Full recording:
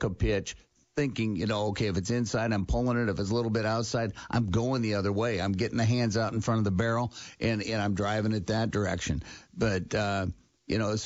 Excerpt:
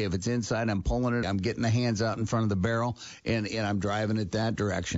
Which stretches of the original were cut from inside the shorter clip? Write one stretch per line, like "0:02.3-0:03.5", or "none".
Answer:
0:03.1-0:05.4